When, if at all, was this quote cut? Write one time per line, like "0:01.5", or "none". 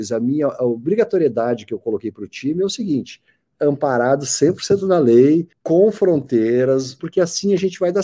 0:05.5
0:07.0